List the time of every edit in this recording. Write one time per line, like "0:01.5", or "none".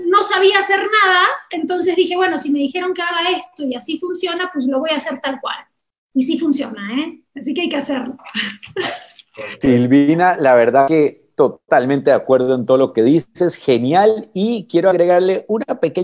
none